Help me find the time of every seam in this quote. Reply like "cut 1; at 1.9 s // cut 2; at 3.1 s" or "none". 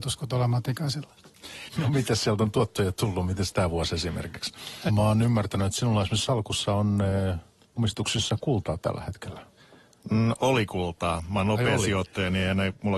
cut 1; at 1.7 s // cut 2; at 4.9 s

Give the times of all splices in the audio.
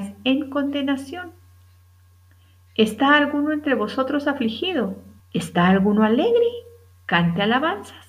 cut 1; at 5.2 s

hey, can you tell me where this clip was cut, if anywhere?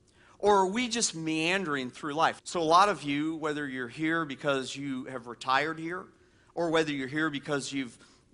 cut 1; at 2.4 s

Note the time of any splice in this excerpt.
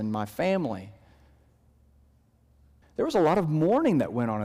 cut 1; at 2.8 s

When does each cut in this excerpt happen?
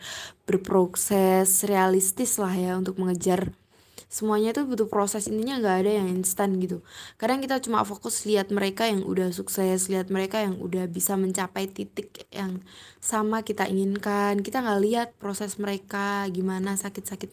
none

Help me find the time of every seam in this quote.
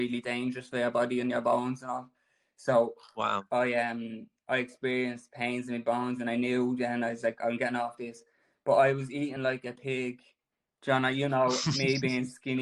none

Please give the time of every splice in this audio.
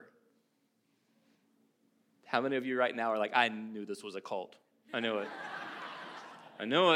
none

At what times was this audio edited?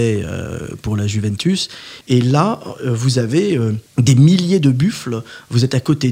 cut 1; at 2.0 s // cut 2; at 3.9 s

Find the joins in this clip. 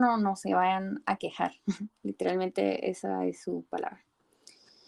none

